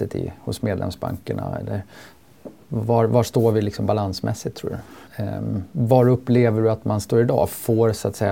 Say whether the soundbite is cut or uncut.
cut